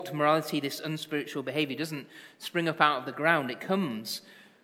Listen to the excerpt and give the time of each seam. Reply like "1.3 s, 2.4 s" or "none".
none

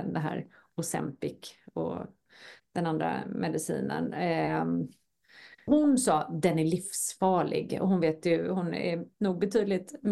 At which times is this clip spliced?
none

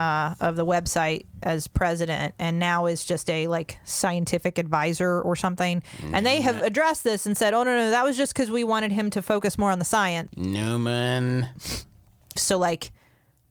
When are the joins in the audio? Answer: 10.3 s, 12.4 s

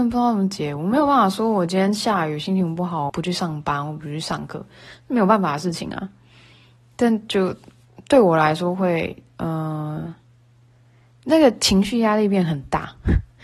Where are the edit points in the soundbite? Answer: 3.1 s

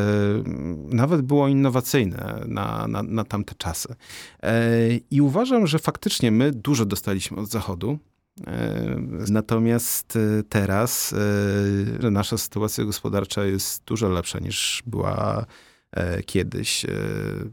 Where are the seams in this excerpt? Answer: 9.3 s, 12.0 s

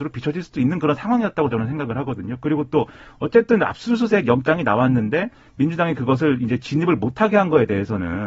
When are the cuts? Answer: none

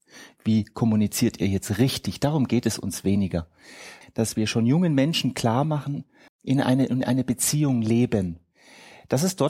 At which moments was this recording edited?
4.0 s, 6.3 s

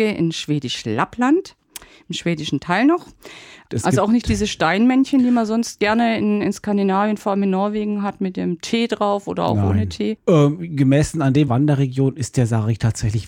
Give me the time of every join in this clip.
3.7 s, 10.2 s, 11.5 s

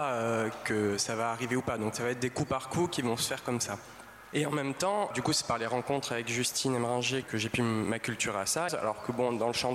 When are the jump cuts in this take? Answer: 5.1 s, 7.2 s, 8.7 s

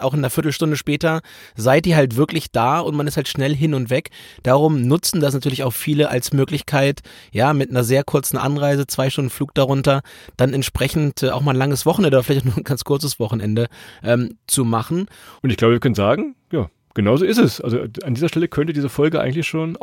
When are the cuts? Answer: 15.4 s

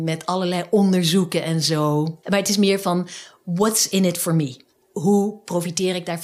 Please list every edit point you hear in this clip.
2.2 s

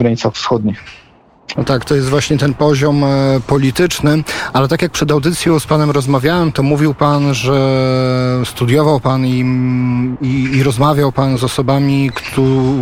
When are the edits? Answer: 1.5 s

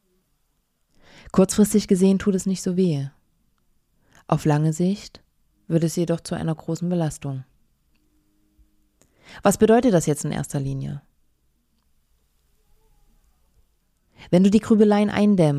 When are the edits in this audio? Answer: none

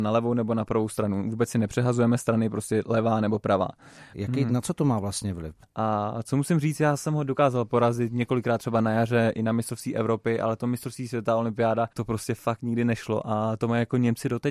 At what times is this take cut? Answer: 4.1 s, 5.6 s, 11.9 s

